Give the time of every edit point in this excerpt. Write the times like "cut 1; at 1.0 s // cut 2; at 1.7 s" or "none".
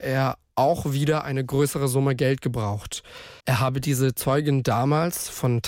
cut 1; at 3.4 s